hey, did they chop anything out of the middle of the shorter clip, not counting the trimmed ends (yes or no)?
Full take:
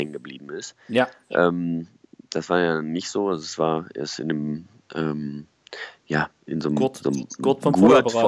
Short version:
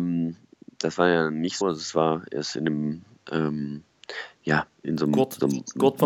yes